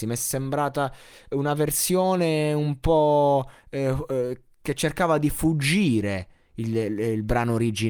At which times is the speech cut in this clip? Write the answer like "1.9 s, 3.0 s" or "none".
none